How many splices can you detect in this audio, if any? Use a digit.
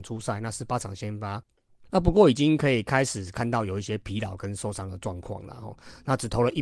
0